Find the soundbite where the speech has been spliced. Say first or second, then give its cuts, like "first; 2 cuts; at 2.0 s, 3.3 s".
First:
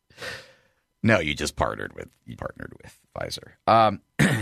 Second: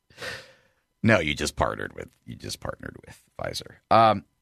first; 1 cut; at 2.4 s